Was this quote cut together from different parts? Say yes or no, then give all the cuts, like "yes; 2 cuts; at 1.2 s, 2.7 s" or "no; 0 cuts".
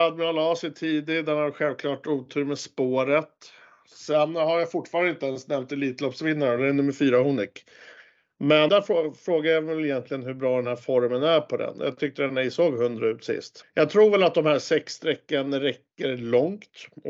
yes; 2 cuts; at 8.7 s, 13.6 s